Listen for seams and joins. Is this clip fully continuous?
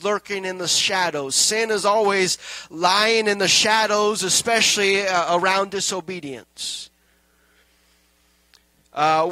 yes; 0 cuts

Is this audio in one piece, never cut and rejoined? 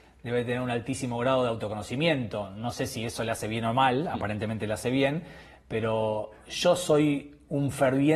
yes; 0 cuts

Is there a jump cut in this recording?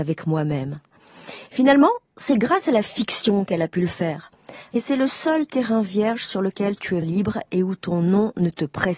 yes; 2 cuts; at 4.7 s, 7.0 s

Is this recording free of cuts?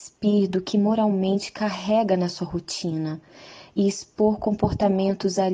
yes; 0 cuts

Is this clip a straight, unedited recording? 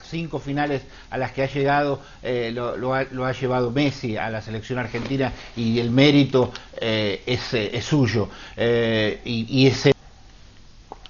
yes; 0 cuts

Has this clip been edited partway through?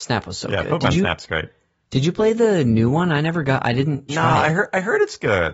no; 0 cuts

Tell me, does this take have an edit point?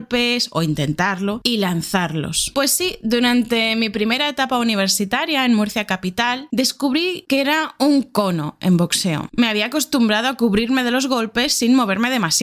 no; 0 cuts

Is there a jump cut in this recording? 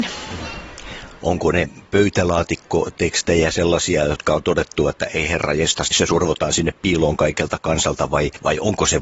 yes; 1 cut; at 5.9 s

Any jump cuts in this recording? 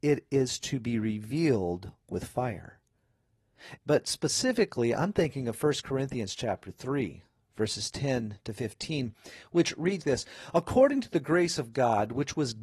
yes; 2 cuts; at 3.8 s, 10.0 s

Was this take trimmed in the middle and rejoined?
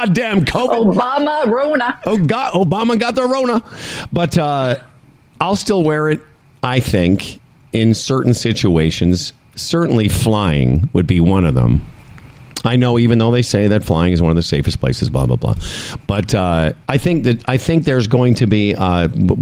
yes; 1 cut; at 16.8 s

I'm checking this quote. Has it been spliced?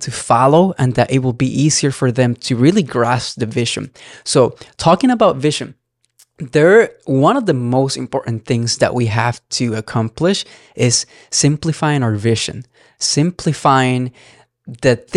no; 0 cuts

